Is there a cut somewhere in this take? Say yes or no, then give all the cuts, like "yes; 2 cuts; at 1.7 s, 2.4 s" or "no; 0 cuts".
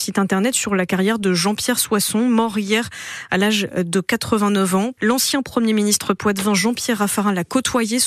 yes; 1 cut; at 5.0 s